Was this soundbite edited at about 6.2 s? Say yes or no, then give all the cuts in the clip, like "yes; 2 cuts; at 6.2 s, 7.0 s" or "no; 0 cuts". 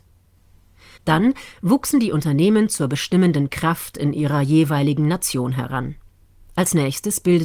no; 1 cut; at 1.0 s